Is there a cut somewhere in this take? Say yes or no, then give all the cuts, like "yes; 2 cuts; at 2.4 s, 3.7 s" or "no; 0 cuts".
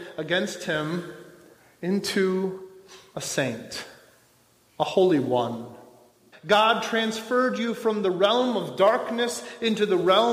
yes; 1 cut; at 6.3 s